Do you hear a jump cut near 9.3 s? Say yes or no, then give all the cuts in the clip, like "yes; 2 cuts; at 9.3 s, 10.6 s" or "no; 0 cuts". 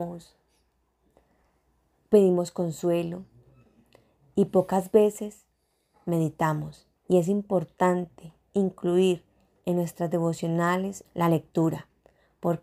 no; 2 cuts; at 7.0 s, 11.0 s